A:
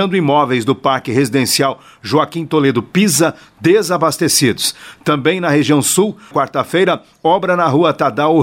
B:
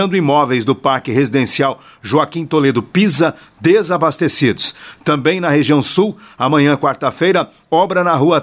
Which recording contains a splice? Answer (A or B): A